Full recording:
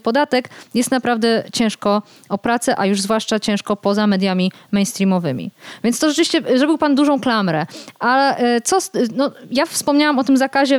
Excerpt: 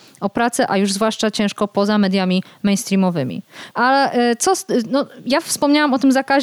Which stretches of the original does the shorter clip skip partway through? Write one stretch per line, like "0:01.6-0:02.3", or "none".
0:05.8-0:08.0